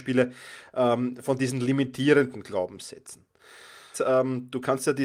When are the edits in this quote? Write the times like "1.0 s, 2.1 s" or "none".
3.9 s